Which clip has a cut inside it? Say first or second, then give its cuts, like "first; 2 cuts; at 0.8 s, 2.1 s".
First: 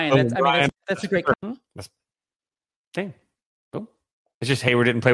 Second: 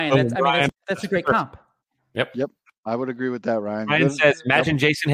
first; 1 cut; at 1.3 s